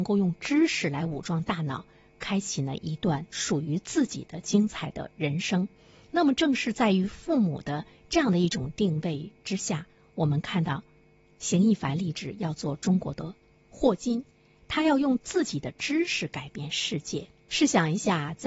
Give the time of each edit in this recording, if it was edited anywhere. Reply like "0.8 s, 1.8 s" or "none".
none

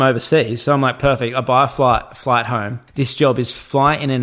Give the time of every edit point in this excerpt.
2.9 s

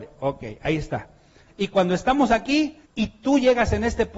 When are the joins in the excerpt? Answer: 1.5 s, 2.8 s

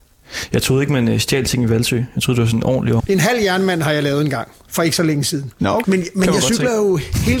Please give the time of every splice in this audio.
3.0 s, 5.8 s

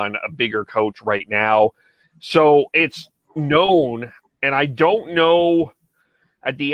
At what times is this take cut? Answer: 2.0 s, 4.3 s

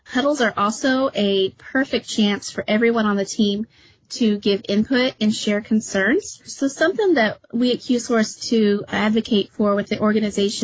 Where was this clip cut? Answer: 6.5 s, 8.4 s

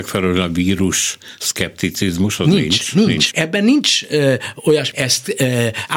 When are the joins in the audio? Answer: 3.3 s, 4.9 s

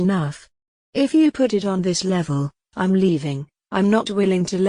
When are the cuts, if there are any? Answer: none

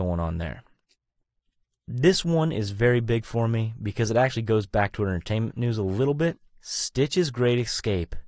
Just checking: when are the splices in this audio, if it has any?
6.5 s

